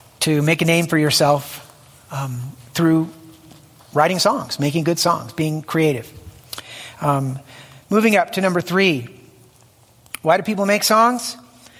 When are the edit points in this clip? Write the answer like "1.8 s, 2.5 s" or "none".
none